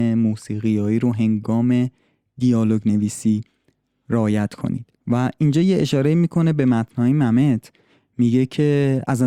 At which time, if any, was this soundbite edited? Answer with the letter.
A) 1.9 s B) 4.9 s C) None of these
B